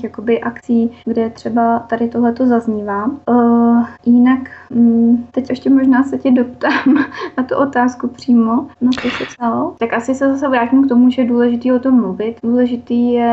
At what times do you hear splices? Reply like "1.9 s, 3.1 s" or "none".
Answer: 5.5 s, 9.8 s